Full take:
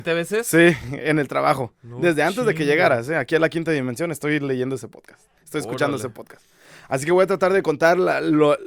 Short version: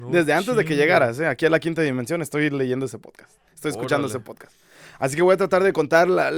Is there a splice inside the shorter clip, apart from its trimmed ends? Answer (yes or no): no